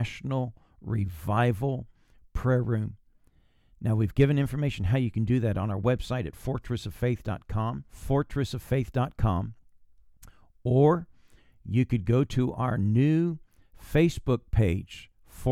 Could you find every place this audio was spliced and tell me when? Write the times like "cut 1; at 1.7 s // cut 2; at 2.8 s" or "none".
cut 1; at 7.9 s